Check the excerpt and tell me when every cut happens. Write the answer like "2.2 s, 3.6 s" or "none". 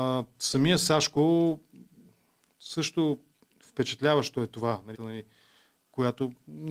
4.9 s